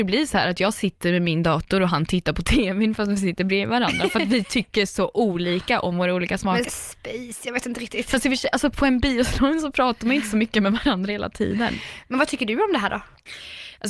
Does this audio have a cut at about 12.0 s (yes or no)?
no